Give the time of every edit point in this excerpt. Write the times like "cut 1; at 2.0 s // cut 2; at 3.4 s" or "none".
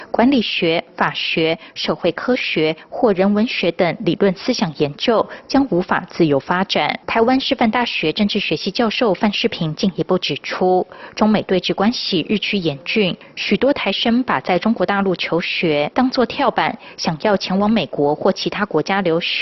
cut 1; at 7.0 s

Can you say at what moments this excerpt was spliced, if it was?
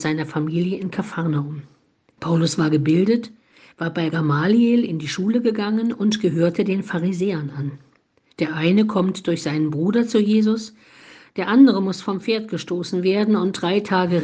cut 1; at 2.2 s // cut 2; at 8.3 s

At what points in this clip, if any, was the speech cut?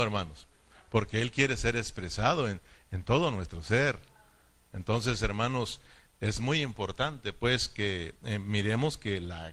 none

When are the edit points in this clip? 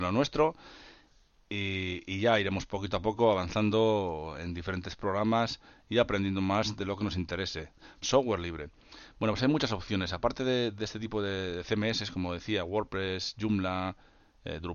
cut 1; at 8.0 s

